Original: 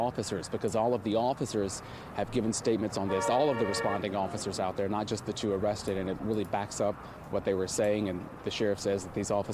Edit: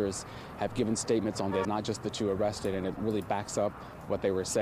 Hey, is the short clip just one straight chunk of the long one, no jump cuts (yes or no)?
no